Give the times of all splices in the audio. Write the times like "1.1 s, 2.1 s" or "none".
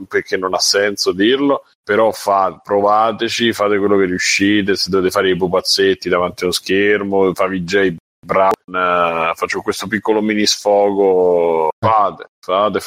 8.6 s, 11.8 s